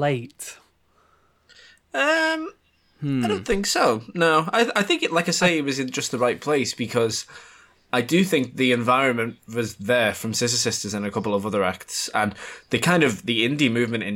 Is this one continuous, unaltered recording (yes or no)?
yes